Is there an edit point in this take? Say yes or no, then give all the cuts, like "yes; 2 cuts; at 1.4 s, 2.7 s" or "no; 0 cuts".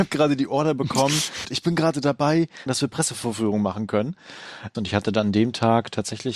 yes; 3 cuts; at 1.4 s, 2.7 s, 4.7 s